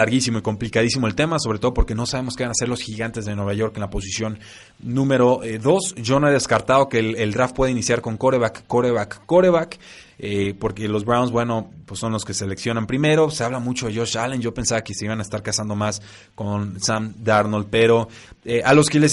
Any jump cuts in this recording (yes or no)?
no